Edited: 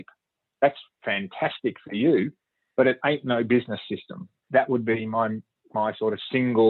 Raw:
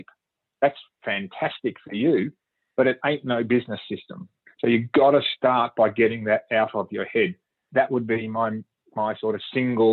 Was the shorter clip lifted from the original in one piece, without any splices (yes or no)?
no